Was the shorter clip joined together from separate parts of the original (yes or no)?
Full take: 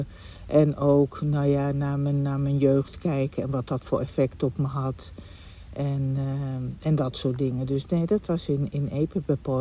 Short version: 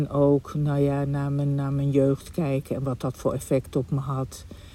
no